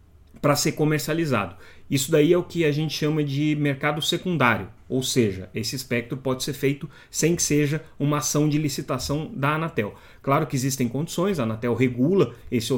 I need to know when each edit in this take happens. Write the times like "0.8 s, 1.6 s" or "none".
none